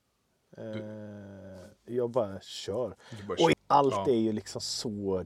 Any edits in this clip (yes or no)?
yes